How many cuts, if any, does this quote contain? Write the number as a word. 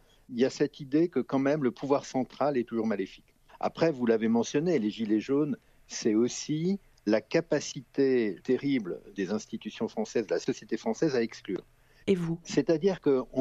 three